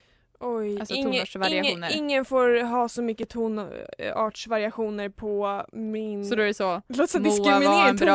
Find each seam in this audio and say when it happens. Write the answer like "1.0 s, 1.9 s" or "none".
none